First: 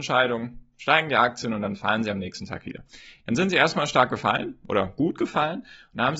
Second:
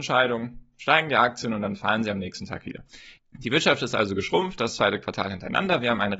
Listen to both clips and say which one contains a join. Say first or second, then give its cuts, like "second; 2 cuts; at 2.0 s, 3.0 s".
second; 1 cut; at 3.2 s